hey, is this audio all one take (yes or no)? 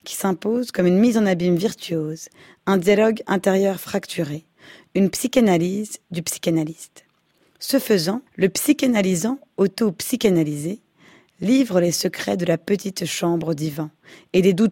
no